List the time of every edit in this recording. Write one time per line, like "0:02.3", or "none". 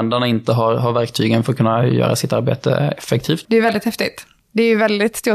0:03.4